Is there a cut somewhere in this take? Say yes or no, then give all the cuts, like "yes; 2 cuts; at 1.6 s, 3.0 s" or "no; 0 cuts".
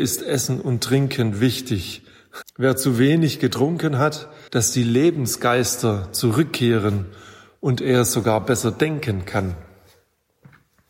yes; 2 cuts; at 2.4 s, 4.5 s